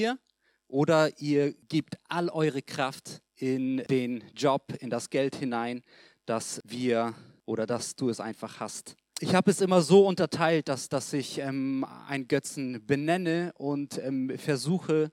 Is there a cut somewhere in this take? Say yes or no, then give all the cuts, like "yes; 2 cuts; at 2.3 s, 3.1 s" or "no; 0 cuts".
no; 0 cuts